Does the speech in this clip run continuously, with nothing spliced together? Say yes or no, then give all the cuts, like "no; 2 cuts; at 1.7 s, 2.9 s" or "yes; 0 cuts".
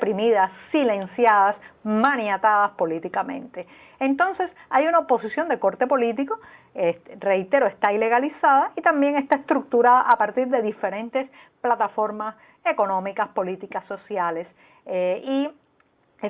yes; 0 cuts